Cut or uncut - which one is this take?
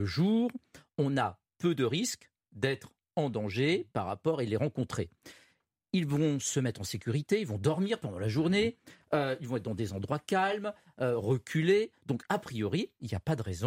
uncut